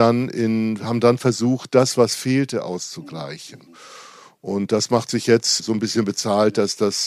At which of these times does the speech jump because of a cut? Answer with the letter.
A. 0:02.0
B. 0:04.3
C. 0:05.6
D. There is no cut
C